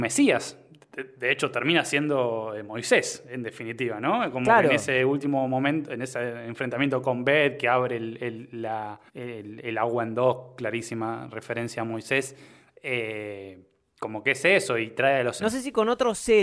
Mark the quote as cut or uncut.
cut